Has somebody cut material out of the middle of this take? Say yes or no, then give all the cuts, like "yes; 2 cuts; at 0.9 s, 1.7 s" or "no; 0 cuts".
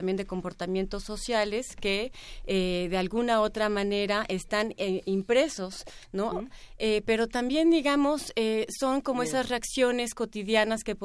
yes; 1 cut; at 6.3 s